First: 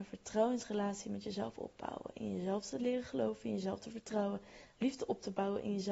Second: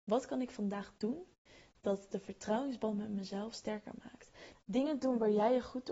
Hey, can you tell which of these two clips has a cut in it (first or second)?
second